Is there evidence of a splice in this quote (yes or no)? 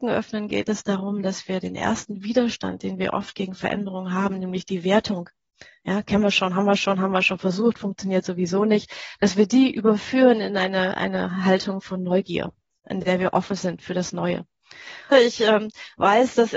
yes